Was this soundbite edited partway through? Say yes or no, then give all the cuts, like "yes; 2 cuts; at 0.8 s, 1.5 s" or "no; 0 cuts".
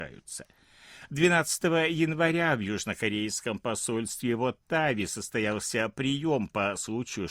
no; 0 cuts